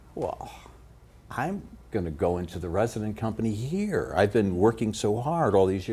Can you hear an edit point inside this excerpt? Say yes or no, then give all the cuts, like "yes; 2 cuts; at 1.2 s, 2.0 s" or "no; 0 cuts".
no; 0 cuts